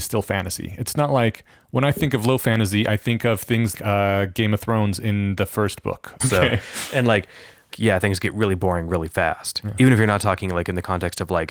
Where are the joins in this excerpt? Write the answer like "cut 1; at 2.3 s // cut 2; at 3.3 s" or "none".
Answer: cut 1; at 3.7 s // cut 2; at 6.2 s // cut 3; at 7.7 s